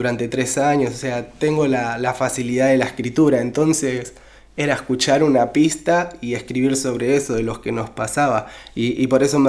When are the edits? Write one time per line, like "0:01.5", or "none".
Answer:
none